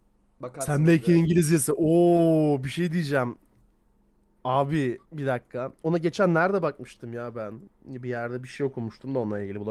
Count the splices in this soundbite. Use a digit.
1